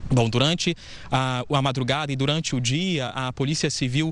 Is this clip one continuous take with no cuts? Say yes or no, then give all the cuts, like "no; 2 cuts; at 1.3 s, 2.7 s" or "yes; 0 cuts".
yes; 0 cuts